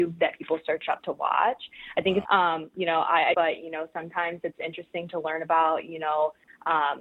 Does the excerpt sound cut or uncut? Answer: cut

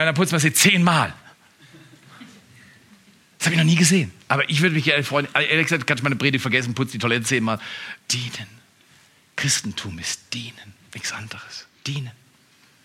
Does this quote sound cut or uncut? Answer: cut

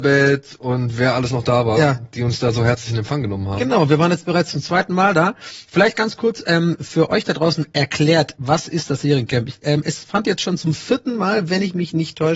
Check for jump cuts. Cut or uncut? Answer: uncut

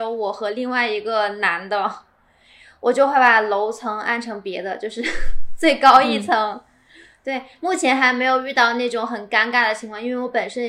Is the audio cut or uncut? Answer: uncut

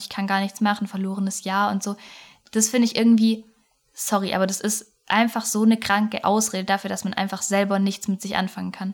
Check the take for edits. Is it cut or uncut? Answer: uncut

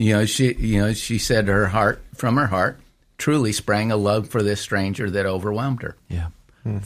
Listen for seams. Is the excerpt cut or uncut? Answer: uncut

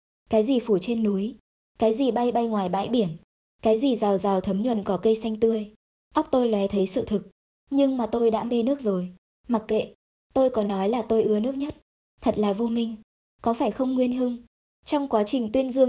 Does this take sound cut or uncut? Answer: cut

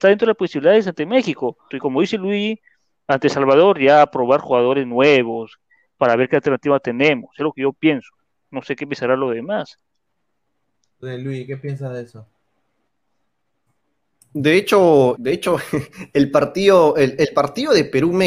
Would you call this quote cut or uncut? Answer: cut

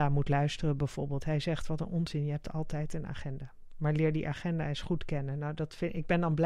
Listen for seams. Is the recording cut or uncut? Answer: uncut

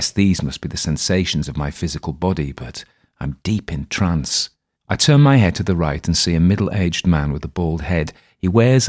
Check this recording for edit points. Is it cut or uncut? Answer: cut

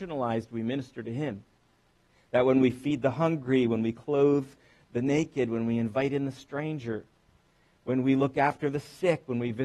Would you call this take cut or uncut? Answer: uncut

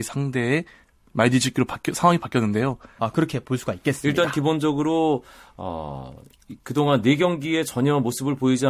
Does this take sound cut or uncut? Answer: cut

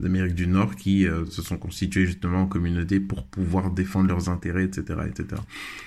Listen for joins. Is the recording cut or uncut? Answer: uncut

